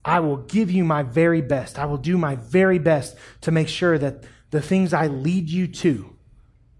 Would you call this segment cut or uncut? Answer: uncut